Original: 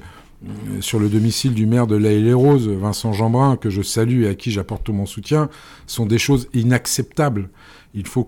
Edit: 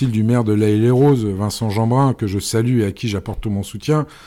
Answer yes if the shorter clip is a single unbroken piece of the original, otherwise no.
yes